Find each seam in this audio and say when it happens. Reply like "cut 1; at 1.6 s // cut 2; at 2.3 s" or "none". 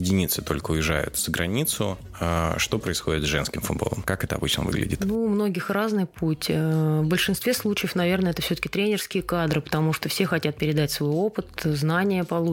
cut 1; at 4.0 s